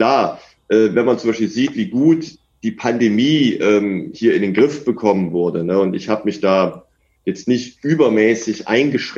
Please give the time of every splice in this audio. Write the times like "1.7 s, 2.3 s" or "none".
none